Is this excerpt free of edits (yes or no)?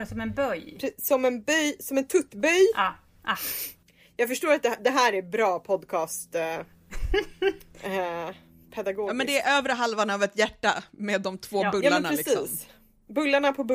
no